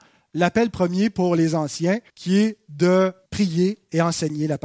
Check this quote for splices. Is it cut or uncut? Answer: cut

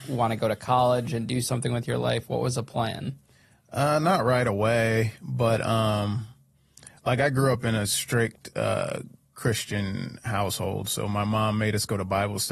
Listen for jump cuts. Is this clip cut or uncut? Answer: uncut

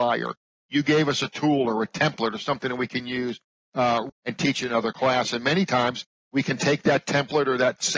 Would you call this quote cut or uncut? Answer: cut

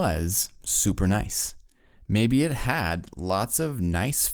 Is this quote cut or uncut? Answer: uncut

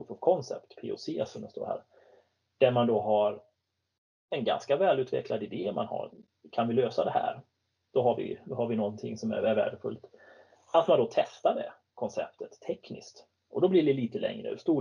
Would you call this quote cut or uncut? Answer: uncut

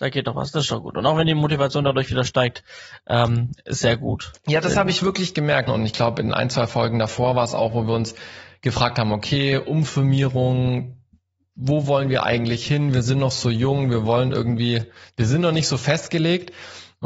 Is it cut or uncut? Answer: cut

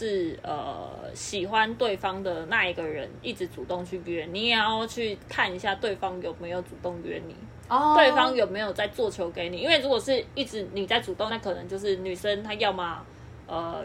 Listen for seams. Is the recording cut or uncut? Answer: cut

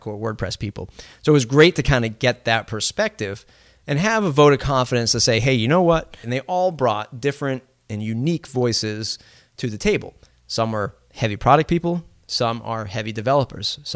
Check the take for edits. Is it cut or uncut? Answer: cut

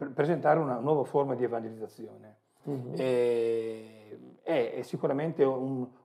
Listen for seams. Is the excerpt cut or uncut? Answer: cut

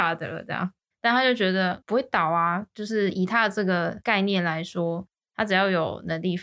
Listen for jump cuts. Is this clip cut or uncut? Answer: cut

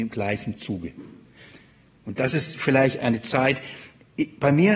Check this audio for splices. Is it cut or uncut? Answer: cut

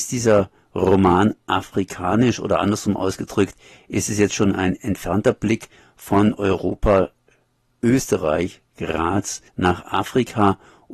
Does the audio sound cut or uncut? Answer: cut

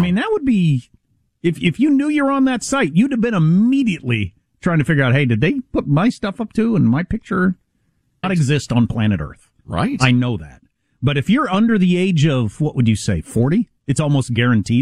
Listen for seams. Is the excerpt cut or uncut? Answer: cut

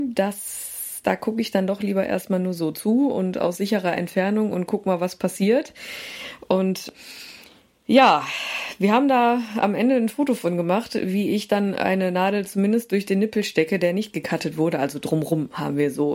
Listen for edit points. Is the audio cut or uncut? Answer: uncut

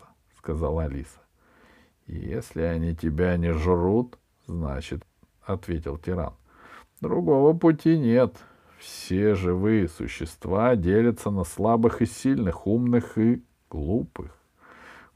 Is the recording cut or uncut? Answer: cut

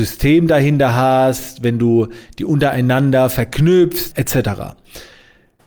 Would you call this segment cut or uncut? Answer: cut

